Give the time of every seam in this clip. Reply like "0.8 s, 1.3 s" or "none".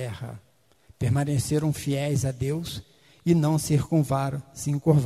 none